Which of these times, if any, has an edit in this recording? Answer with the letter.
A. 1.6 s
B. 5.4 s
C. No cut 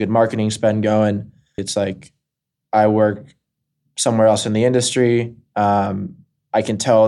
A